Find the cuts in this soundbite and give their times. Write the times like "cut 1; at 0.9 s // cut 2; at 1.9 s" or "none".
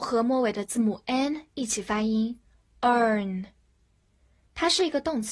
none